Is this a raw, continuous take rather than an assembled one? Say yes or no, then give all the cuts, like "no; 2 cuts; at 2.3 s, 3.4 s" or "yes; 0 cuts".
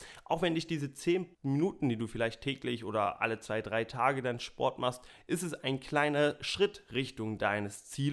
no; 2 cuts; at 1.3 s, 5.2 s